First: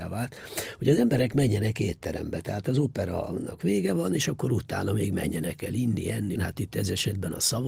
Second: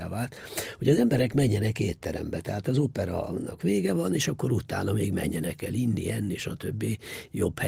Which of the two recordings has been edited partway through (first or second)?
first